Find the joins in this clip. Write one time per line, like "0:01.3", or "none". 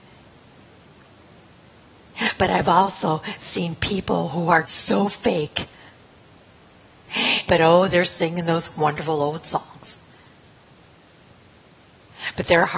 0:04.6
0:07.5